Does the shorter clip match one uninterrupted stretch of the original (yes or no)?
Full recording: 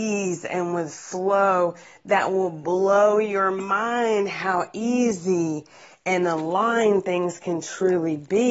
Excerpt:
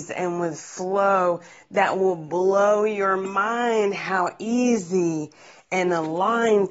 yes